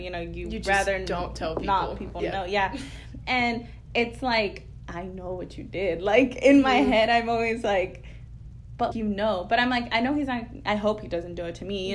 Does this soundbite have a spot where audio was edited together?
yes; 1 cut; at 8.9 s

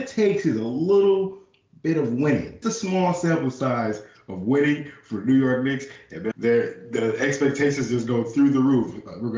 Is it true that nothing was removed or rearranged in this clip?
no; 2 cuts; at 2.6 s, 6.3 s

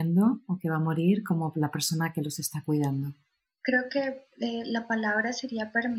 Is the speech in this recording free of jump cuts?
yes; 0 cuts

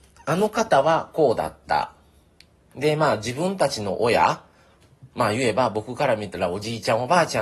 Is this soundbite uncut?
yes; 0 cuts

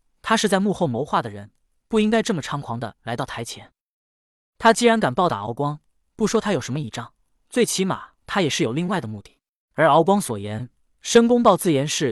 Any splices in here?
no; 0 cuts

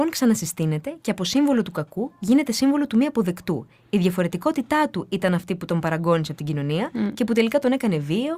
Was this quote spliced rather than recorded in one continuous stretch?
no; 0 cuts

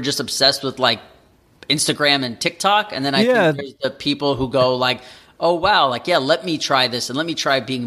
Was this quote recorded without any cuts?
yes; 0 cuts

